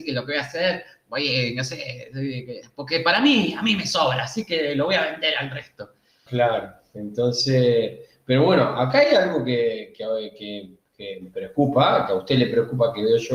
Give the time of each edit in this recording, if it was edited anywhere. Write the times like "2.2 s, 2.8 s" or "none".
6.3 s